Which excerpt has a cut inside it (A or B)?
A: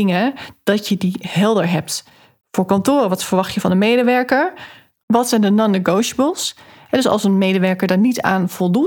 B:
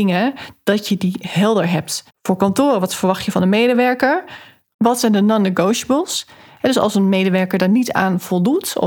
B